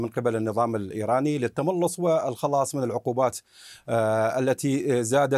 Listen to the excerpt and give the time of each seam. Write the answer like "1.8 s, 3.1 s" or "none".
none